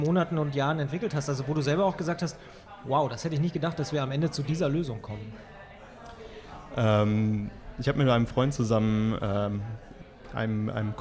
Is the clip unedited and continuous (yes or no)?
yes